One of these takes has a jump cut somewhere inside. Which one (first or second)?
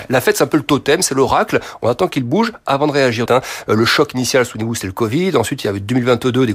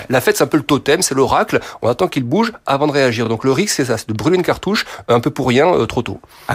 first